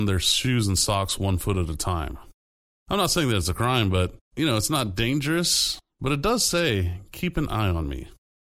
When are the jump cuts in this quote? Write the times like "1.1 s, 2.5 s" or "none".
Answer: 2.7 s, 4.3 s